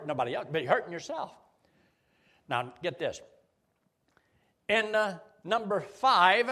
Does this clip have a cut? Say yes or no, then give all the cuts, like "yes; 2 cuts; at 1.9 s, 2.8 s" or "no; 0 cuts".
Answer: no; 0 cuts